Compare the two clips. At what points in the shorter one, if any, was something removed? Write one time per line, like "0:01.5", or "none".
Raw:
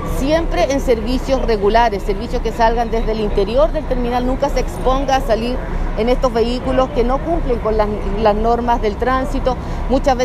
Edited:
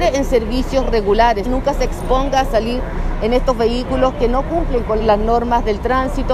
0:01.4
0:05.0